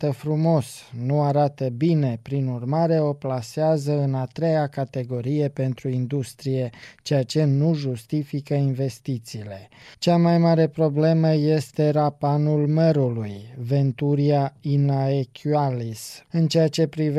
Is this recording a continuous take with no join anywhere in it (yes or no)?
no